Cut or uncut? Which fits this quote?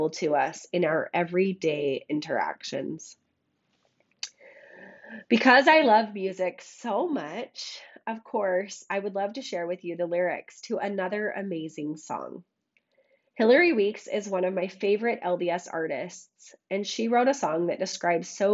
uncut